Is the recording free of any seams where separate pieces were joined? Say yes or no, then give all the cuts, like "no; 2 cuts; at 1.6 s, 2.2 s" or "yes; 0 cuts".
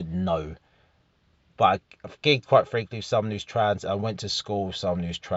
yes; 0 cuts